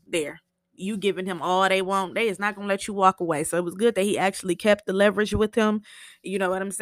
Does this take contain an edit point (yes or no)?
no